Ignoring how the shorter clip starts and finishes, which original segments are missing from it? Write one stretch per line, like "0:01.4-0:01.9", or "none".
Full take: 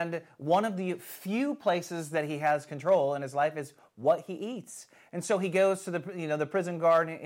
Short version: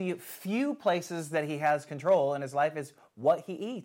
none